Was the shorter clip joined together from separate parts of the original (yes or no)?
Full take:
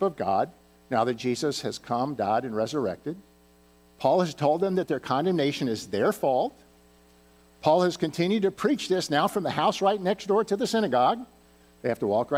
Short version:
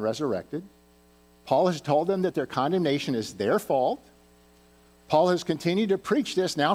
no